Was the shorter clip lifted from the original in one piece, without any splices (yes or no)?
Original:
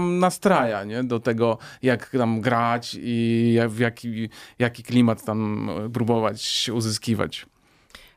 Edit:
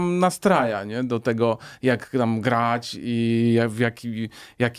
yes